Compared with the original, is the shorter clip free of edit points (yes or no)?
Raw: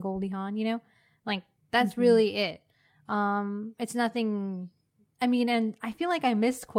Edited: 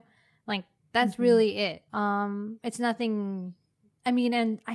no